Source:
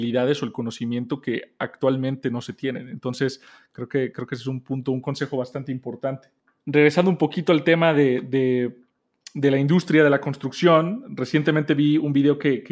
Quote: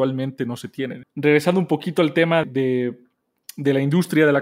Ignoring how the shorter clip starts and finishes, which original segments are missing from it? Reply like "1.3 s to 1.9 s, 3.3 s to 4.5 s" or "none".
2.9 s to 6.5 s, 7.9 s to 8.2 s